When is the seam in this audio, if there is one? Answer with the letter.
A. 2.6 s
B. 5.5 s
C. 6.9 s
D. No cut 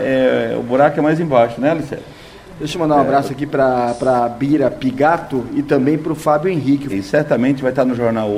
C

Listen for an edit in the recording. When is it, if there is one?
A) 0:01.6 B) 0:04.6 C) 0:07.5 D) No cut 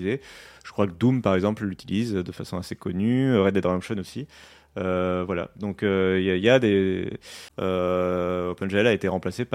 C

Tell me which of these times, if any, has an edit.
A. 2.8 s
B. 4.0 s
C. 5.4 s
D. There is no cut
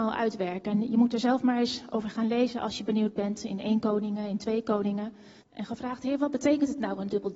C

